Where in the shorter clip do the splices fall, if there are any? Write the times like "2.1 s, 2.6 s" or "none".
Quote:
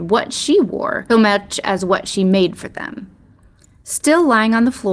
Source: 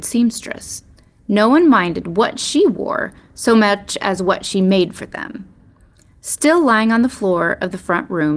1.1 s